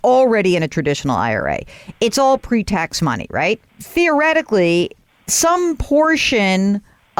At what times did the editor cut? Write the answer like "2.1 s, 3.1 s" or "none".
3.7 s